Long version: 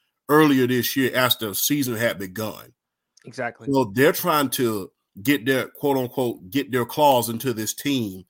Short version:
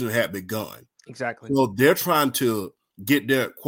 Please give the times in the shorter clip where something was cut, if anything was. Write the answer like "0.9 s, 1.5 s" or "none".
1.0 s